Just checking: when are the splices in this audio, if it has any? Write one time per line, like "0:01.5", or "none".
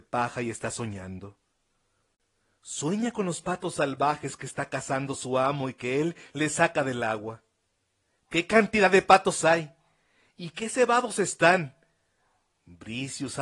0:06.3